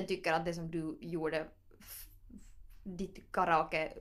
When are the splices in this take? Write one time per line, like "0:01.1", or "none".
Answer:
none